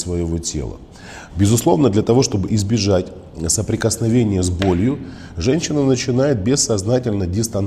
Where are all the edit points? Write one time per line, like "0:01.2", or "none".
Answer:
0:01.3

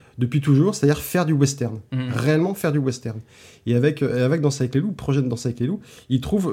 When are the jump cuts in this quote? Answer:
none

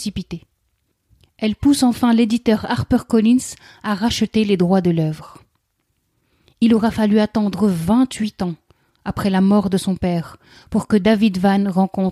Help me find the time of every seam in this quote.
none

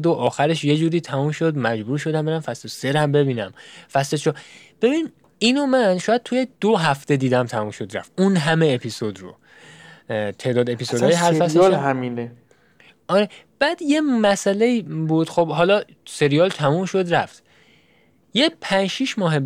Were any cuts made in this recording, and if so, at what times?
none

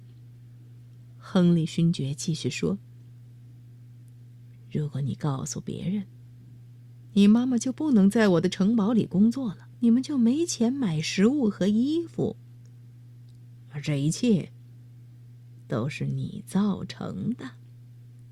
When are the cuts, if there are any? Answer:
0:09.7

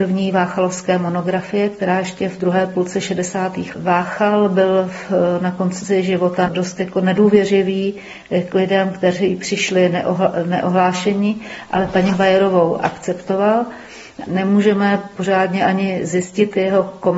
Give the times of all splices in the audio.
0:03.7
0:06.5
0:14.3

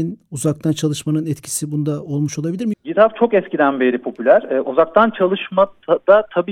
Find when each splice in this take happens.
0:02.7

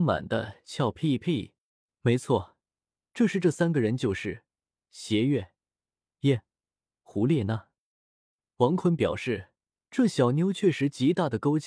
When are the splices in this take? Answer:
none

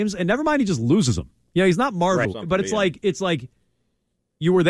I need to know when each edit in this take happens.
0:02.2

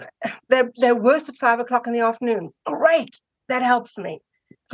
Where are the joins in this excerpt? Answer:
none

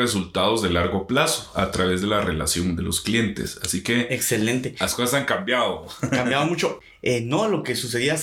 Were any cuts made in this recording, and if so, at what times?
none

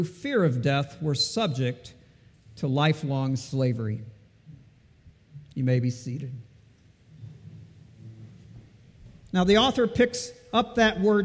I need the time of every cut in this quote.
0:09.3

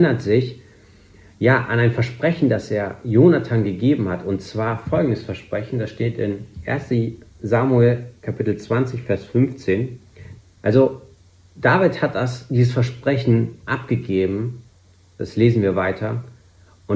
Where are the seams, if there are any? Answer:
0:10.4

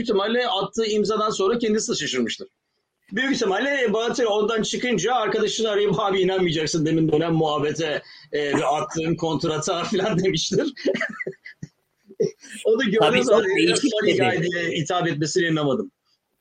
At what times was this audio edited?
0:03.1

